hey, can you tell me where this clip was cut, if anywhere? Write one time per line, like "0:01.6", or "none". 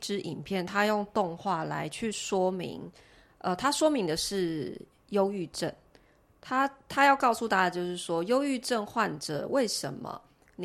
none